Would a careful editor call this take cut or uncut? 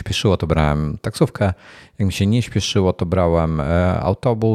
uncut